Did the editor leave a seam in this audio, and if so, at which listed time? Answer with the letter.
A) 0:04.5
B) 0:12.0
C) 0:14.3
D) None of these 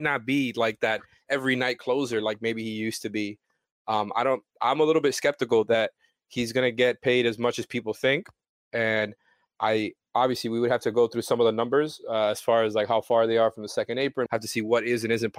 C